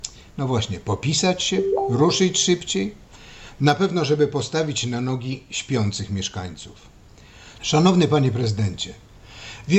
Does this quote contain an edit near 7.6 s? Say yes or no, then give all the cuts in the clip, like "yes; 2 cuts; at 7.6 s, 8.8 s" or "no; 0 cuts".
yes; 1 cut; at 7.6 s